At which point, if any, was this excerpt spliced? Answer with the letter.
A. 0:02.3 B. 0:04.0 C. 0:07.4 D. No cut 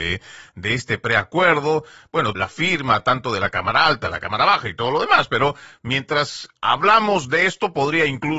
A